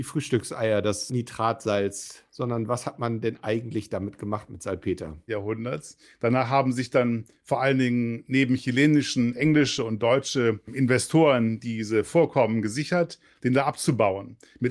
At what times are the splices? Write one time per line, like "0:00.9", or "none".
0:05.3
0:13.4